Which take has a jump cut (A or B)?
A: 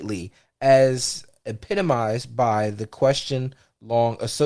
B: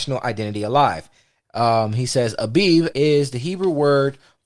B